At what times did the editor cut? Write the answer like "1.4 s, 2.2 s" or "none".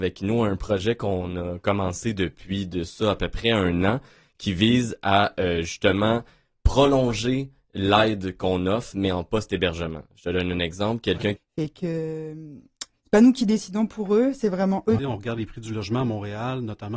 11.4 s, 15.0 s